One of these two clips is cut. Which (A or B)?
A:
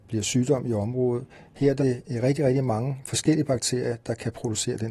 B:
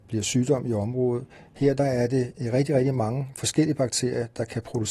A